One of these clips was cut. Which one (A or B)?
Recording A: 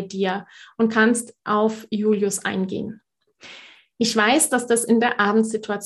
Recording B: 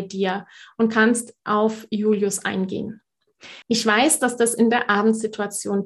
B